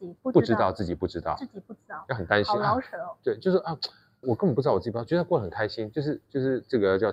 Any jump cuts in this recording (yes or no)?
yes